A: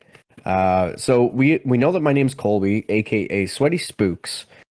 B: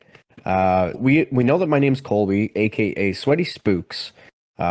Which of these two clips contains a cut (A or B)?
B